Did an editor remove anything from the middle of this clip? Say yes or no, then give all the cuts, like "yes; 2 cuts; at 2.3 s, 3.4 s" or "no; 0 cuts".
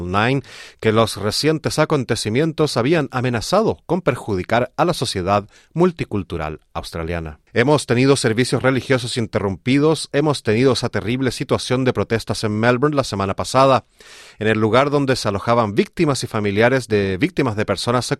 yes; 1 cut; at 7.5 s